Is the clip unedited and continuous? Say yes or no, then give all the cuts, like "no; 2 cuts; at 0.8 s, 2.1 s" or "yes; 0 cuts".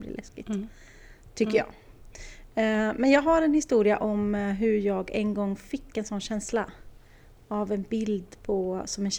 yes; 0 cuts